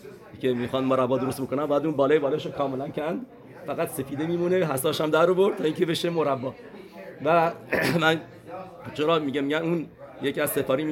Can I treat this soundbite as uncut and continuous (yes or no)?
yes